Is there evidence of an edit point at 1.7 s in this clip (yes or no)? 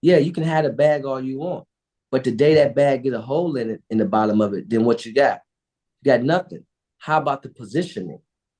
no